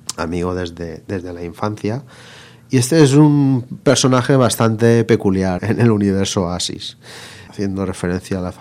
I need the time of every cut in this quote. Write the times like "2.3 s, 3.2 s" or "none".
5.6 s, 7.5 s